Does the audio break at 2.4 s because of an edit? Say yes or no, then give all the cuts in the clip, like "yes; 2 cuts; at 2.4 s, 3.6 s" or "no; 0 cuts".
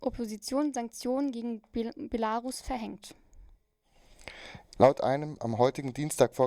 no; 1 cut; at 4.8 s